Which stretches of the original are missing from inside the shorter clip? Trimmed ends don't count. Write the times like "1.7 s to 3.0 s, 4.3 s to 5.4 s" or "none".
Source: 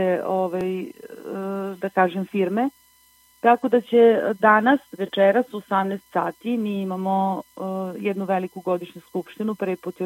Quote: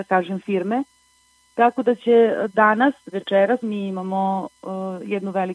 5.5 s to 6.6 s